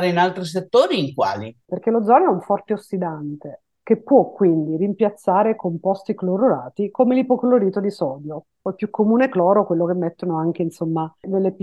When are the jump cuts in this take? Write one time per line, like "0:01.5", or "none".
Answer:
0:01.7